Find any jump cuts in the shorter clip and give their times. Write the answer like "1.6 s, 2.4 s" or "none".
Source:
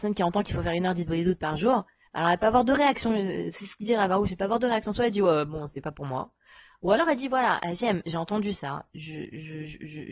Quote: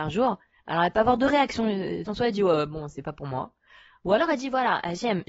2.1 s